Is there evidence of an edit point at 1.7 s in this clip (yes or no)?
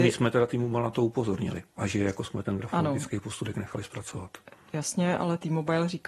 yes